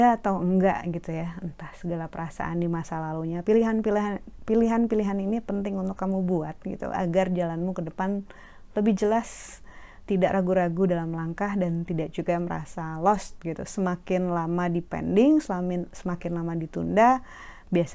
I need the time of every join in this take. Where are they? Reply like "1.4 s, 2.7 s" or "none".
none